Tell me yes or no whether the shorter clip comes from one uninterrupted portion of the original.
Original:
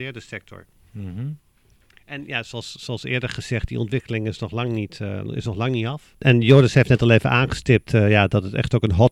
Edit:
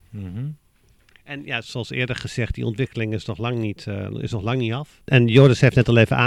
no